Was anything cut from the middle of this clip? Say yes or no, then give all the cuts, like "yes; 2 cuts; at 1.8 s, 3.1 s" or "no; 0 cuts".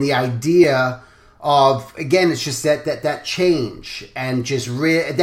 no; 0 cuts